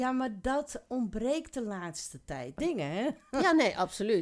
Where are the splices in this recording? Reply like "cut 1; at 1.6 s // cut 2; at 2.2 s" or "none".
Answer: cut 1; at 2.6 s